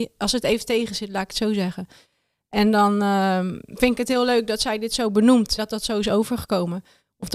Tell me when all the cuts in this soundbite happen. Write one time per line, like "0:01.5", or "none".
0:05.6